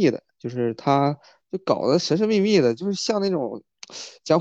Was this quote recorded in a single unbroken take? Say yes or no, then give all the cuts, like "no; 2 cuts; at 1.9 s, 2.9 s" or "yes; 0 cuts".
no; 1 cut; at 1.4 s